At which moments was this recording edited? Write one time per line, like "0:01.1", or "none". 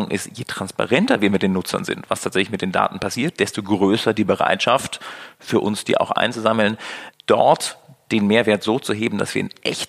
none